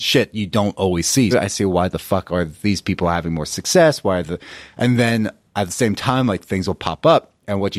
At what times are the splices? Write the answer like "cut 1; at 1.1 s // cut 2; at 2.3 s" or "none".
cut 1; at 1.3 s